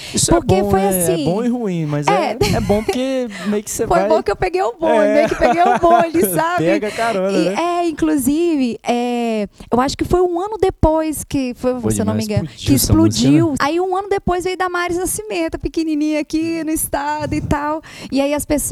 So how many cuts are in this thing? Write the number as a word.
three